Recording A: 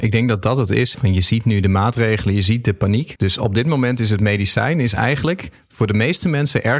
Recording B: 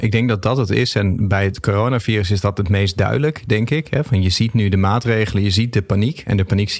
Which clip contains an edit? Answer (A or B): A